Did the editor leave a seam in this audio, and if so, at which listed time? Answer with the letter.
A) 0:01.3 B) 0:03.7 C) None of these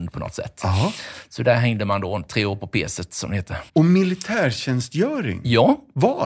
B